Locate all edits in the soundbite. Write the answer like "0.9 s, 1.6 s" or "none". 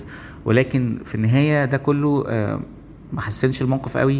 3.1 s